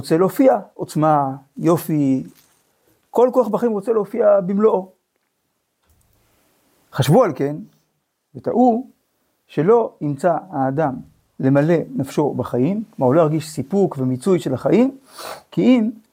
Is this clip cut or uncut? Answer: uncut